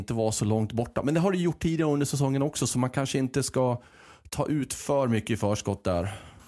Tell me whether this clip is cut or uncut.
cut